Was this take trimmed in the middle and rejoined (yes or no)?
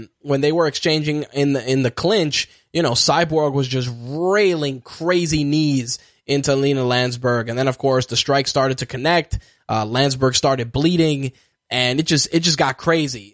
no